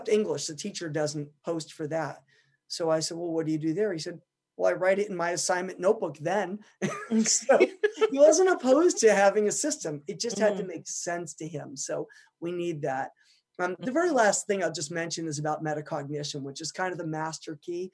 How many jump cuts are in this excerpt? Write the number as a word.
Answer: zero